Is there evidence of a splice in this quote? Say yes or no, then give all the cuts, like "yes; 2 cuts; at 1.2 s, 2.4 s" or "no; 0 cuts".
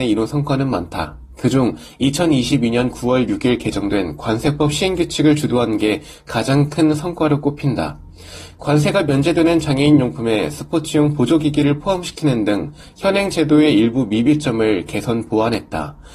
no; 0 cuts